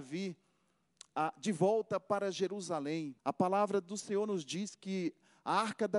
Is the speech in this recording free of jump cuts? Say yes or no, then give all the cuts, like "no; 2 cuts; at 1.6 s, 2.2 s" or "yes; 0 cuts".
no; 1 cut; at 3.2 s